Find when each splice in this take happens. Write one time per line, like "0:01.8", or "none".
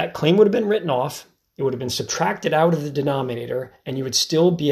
none